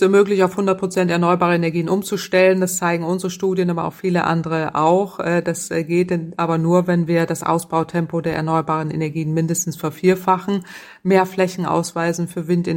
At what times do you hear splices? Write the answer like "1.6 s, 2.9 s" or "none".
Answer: none